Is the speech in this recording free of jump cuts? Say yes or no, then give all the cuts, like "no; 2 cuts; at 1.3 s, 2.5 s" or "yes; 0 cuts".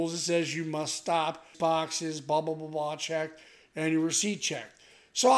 no; 1 cut; at 1.5 s